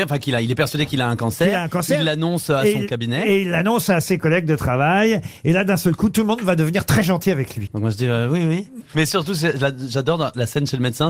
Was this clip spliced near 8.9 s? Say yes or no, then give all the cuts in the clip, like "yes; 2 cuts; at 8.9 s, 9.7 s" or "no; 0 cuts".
no; 1 cut; at 7.7 s